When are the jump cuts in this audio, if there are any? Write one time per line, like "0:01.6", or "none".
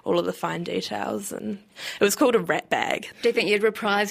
0:03.1